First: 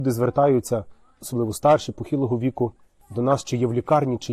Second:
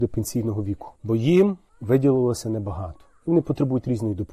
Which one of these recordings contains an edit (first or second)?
second